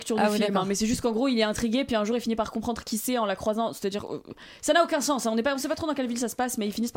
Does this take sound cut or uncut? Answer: uncut